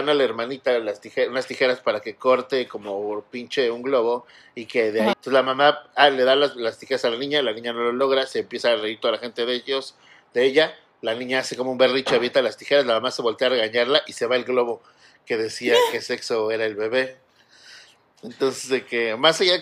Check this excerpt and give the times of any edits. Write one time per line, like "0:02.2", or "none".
0:05.1